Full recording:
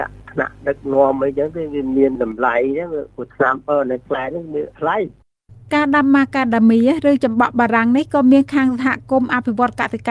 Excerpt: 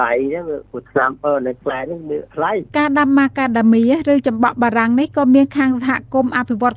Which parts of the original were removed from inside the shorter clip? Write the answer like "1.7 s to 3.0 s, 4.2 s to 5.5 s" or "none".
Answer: 5.1 s to 5.7 s